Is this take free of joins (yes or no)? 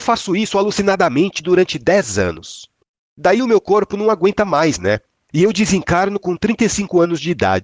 no